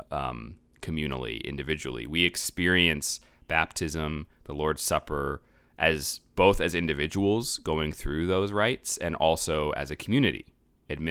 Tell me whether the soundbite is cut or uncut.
uncut